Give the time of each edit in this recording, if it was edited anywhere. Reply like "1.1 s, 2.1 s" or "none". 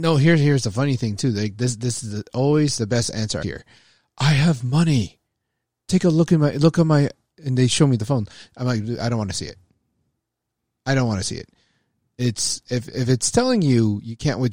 3.4 s